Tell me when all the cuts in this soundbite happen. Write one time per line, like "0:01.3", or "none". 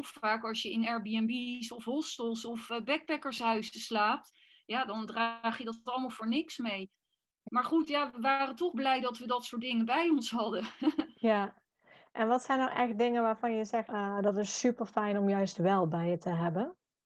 0:07.5
0:13.9